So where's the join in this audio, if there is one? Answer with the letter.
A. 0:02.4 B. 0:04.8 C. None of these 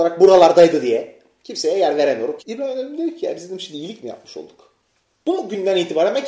A